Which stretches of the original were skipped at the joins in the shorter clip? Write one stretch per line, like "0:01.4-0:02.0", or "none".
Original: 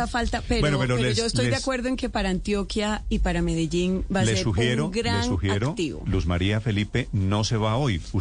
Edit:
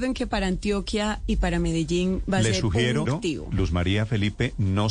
0:04.9-0:05.6